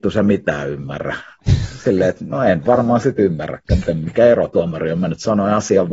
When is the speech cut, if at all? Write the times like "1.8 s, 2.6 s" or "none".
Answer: none